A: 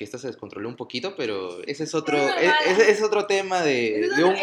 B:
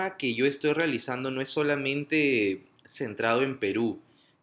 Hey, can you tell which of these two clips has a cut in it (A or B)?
A